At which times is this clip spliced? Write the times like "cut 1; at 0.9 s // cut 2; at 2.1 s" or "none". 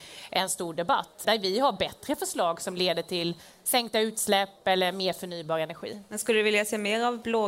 cut 1; at 1.2 s